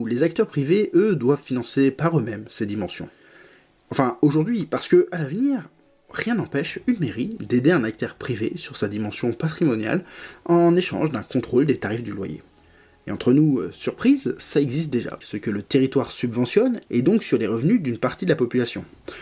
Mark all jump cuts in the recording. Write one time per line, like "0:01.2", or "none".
0:15.2
0:16.9